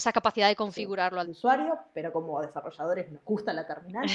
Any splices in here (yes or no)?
yes